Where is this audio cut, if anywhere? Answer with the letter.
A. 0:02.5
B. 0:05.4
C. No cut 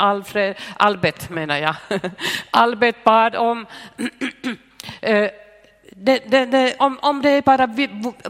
C